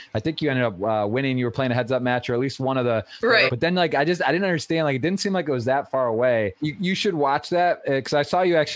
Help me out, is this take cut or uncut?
cut